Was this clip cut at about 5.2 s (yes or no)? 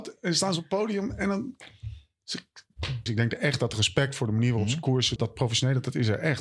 yes